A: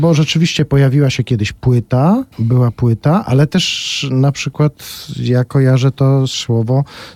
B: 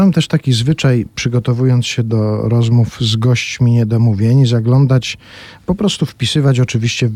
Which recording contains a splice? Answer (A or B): A